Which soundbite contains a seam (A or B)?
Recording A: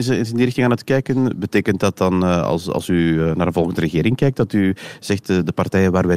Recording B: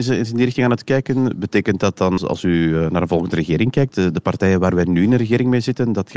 B